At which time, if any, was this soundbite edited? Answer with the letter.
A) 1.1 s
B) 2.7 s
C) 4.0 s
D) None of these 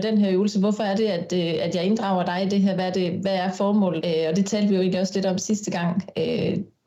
C